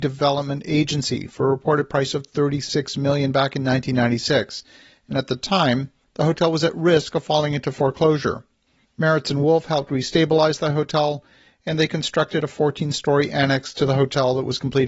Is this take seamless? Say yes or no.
yes